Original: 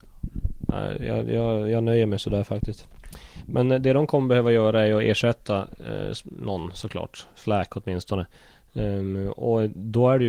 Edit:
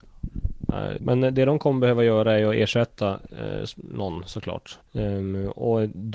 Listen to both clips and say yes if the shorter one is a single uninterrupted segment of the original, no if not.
no